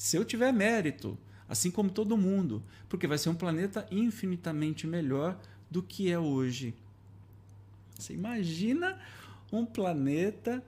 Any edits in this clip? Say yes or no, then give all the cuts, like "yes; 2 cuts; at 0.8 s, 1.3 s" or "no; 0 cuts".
yes; 1 cut; at 8.0 s